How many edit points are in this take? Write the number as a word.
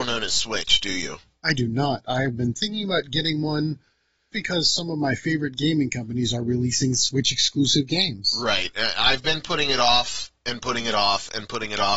one